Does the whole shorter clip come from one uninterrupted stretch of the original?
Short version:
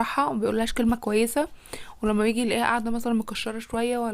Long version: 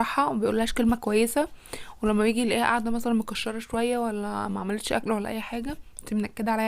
yes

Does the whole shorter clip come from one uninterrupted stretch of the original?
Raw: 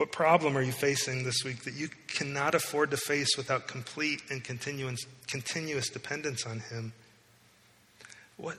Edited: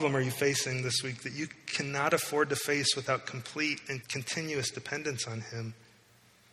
no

